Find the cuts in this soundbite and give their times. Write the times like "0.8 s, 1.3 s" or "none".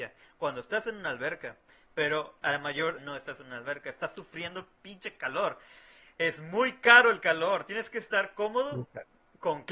3.0 s